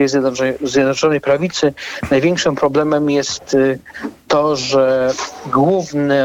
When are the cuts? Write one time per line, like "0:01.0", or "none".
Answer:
none